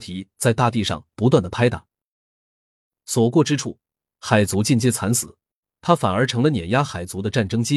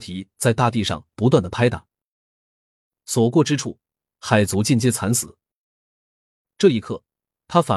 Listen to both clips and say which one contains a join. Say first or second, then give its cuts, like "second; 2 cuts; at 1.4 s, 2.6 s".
first; 1 cut; at 5.6 s